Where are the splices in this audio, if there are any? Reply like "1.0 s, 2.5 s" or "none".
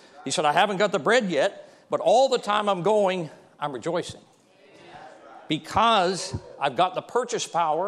none